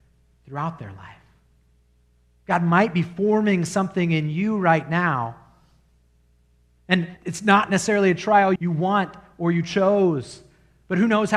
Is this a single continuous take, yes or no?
no